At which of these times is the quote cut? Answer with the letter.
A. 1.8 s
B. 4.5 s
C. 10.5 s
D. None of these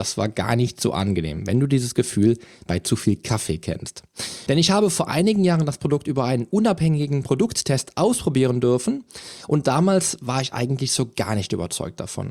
B